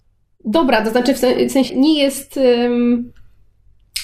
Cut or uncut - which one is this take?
cut